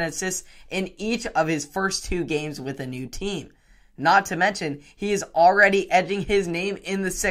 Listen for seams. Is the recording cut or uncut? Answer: uncut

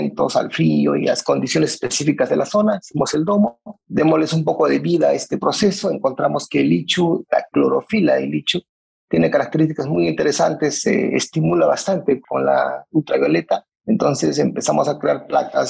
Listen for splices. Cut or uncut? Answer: uncut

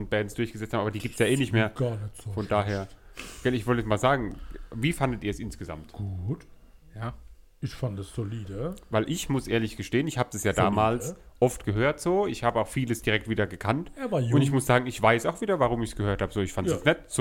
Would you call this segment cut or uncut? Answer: uncut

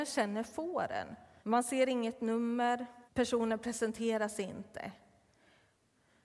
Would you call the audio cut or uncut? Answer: cut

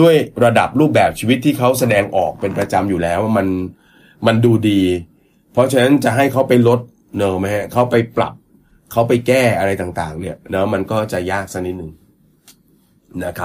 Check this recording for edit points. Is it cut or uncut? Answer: uncut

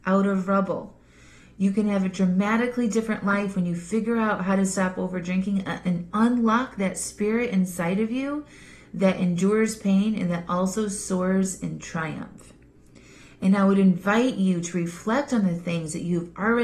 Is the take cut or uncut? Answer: uncut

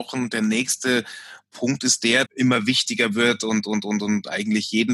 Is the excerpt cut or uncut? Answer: cut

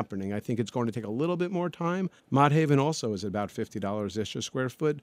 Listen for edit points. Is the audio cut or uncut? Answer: cut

